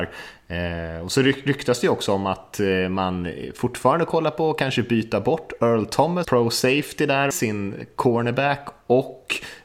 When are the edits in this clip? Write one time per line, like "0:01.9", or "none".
0:06.2
0:07.3